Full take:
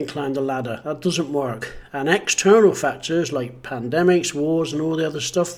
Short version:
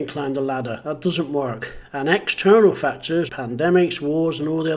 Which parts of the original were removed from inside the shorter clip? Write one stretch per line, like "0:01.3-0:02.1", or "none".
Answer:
0:03.3-0:03.6